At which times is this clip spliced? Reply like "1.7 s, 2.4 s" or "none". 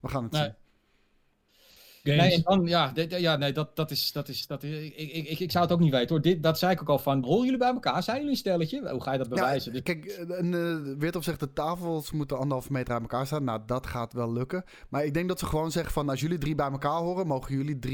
7.2 s

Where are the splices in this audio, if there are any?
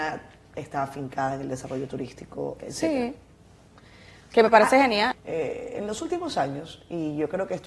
5.1 s

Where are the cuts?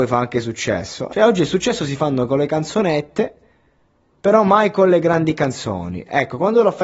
1.1 s

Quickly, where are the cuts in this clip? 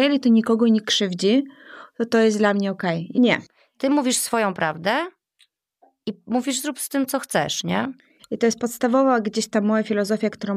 3.1 s, 8.2 s

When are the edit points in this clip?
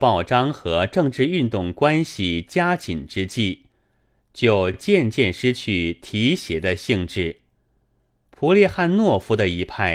none

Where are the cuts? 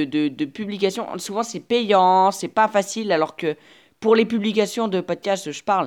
none

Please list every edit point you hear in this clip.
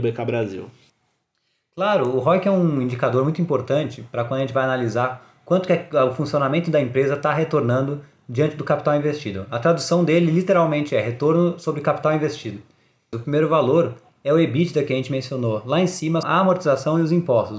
13.1 s, 16.2 s

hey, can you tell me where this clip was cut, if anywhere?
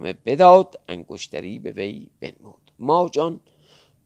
2.7 s

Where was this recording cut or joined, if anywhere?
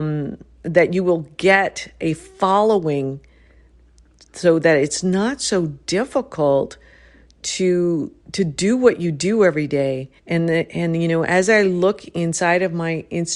8.2 s, 10.2 s

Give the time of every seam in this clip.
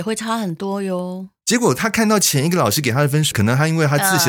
1.4 s, 3.3 s

